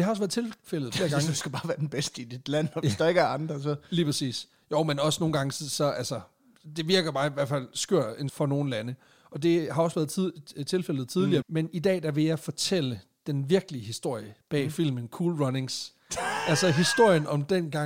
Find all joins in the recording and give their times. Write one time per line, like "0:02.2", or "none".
0:08.3
0:11.4